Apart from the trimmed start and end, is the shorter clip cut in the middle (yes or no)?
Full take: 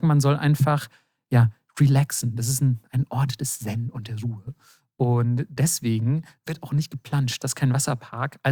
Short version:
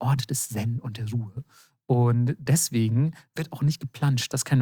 no